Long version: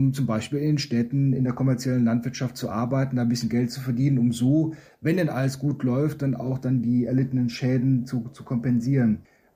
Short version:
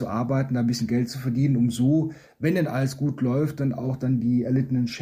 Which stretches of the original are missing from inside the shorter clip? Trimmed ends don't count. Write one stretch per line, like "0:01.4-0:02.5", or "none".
none